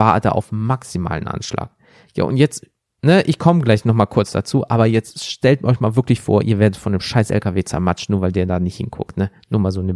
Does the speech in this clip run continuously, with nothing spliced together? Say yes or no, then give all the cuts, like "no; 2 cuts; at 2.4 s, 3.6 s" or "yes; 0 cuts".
yes; 0 cuts